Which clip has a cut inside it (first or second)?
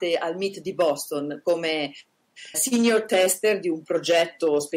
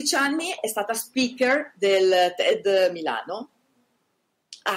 first